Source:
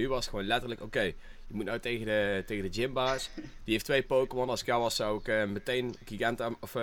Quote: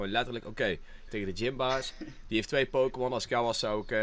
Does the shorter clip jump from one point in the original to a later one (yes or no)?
yes